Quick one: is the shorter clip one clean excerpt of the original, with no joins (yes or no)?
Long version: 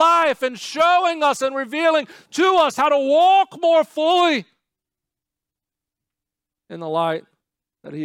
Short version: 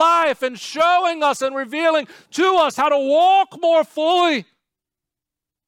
yes